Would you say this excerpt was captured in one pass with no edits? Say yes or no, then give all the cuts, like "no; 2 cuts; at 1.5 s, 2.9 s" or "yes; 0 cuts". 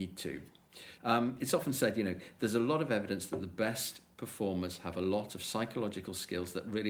no; 1 cut; at 1.0 s